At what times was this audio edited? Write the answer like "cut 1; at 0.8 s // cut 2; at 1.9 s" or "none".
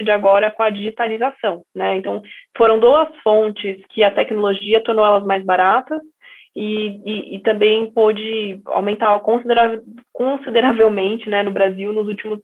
cut 1; at 1.7 s